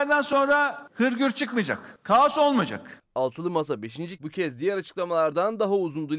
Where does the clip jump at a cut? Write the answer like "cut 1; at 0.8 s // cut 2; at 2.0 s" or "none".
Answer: cut 1; at 3.0 s // cut 2; at 4.2 s